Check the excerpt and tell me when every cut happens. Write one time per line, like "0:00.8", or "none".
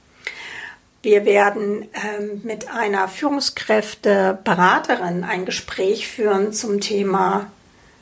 none